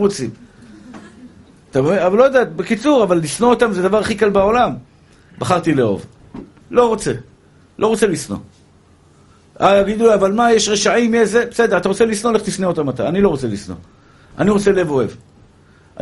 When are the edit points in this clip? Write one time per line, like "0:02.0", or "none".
none